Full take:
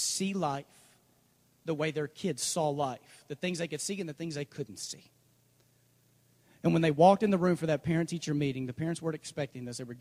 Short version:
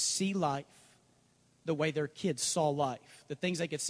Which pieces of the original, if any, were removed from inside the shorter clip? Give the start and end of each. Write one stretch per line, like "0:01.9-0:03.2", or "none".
none